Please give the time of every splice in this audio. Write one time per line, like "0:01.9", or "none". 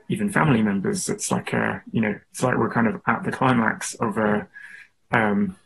none